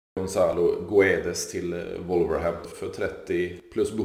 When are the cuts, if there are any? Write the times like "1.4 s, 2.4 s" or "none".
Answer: 2.7 s